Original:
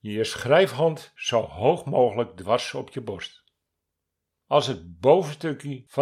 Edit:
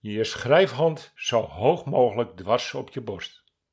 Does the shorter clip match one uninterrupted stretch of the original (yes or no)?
yes